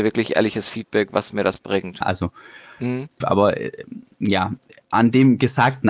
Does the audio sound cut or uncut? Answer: cut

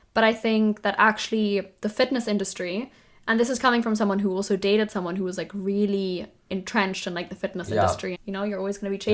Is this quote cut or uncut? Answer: cut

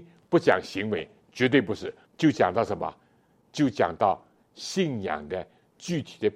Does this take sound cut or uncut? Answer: cut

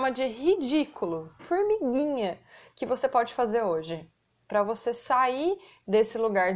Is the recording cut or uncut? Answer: cut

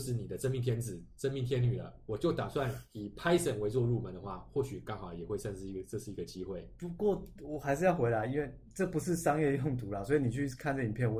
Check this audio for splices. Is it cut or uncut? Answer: uncut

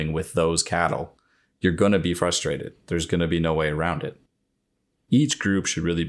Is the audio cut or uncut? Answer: uncut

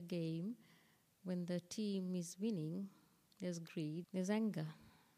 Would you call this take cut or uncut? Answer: cut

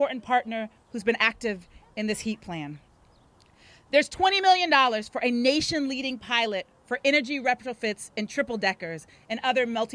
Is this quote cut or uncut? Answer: uncut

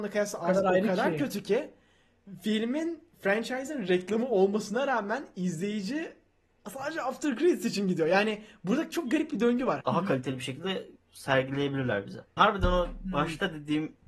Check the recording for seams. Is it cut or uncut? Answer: cut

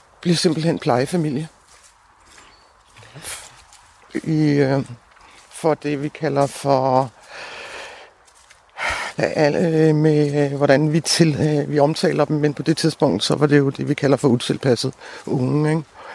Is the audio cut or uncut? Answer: cut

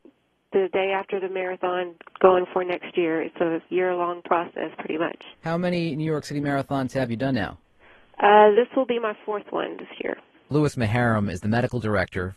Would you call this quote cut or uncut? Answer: cut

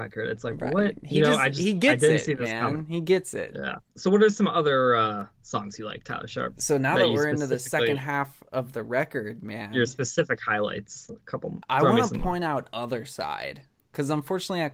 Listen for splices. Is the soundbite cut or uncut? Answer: uncut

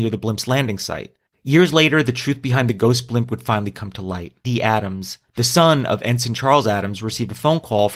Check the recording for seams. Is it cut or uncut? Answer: cut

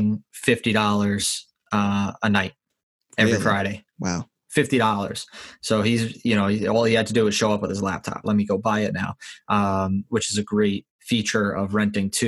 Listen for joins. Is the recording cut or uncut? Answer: cut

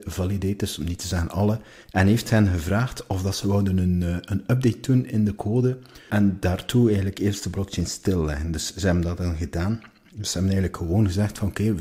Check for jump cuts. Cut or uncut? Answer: uncut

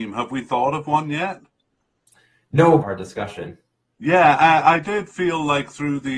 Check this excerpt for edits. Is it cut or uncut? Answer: cut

